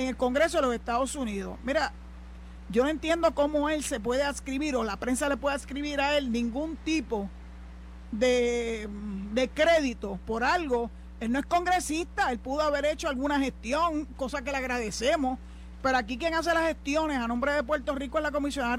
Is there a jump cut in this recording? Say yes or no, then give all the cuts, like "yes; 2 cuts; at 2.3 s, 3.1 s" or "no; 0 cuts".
no; 0 cuts